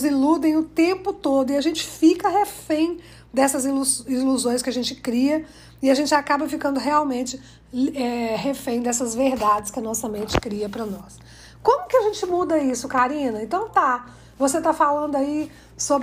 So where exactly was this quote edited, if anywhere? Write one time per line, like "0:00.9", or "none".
none